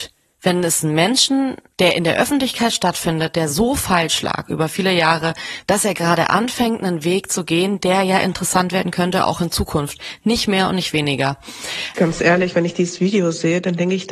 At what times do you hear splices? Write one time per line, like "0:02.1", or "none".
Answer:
0:05.6
0:11.9